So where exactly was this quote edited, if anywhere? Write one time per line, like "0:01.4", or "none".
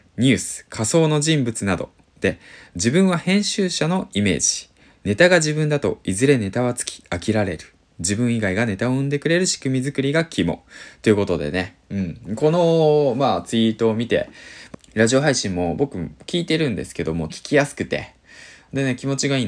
0:14.7
0:17.3